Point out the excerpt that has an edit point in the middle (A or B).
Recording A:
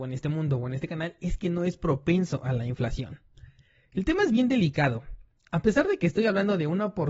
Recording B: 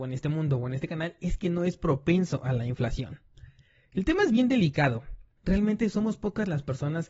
B